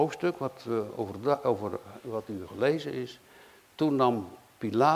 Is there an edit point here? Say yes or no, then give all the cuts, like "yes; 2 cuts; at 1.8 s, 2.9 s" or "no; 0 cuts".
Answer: no; 0 cuts